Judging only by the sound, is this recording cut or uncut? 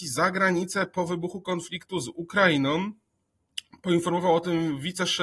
uncut